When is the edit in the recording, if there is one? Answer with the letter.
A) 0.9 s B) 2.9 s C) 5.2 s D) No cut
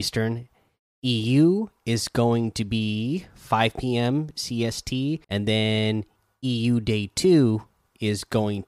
C